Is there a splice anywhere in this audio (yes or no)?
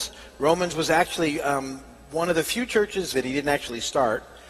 yes